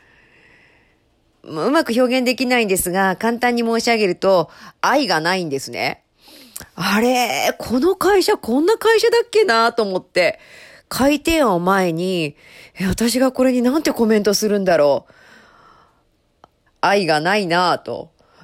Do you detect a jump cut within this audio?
yes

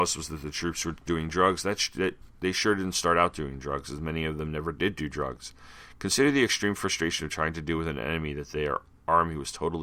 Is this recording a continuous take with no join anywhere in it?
yes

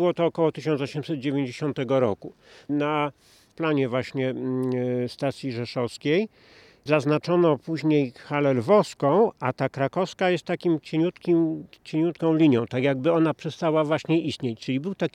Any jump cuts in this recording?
no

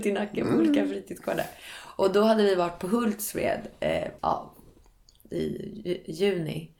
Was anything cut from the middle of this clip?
yes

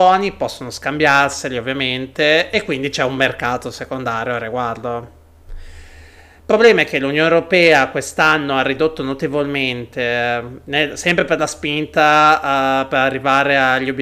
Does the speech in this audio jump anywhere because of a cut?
no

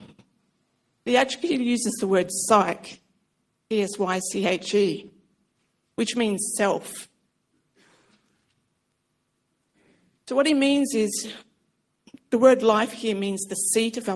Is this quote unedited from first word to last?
no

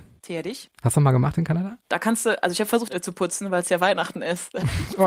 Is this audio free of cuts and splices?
no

